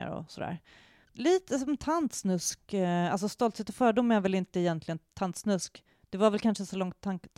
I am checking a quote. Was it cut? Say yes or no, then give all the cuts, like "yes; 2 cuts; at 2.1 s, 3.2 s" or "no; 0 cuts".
yes; 1 cut; at 1.0 s